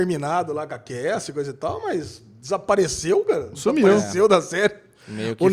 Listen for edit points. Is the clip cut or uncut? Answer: uncut